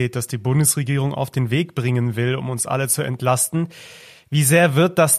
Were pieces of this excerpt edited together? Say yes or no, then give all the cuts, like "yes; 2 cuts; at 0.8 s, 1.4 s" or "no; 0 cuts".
no; 0 cuts